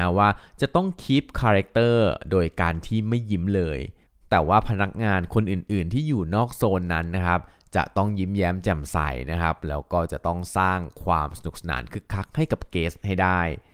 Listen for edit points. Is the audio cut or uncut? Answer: uncut